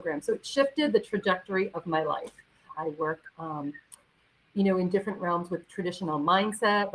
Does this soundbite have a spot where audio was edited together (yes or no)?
yes